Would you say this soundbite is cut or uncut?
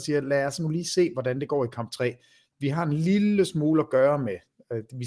uncut